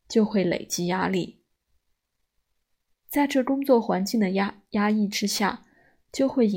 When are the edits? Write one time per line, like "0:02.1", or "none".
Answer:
none

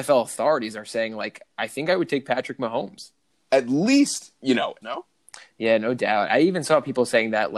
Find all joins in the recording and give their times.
0:03.3
0:04.8

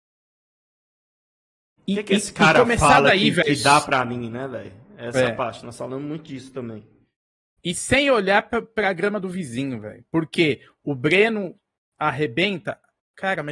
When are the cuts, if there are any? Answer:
none

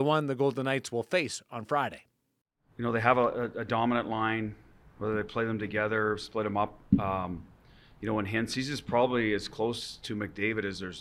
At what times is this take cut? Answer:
none

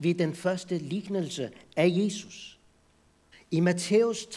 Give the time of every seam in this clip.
0:03.3

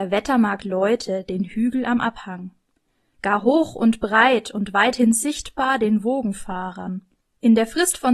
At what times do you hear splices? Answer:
none

